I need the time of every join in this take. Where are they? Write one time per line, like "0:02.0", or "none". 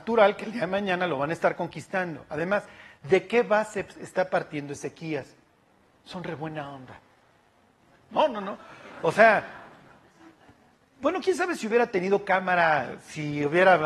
0:08.1